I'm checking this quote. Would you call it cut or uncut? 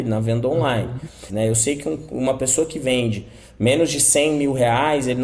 cut